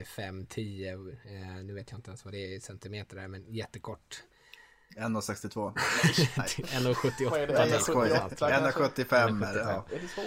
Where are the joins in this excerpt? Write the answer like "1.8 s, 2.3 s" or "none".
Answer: none